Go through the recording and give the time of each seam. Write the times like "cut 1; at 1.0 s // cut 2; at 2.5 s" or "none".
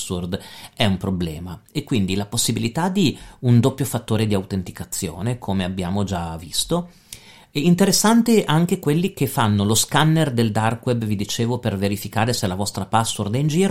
none